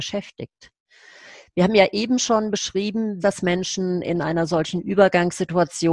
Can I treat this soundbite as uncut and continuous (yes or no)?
no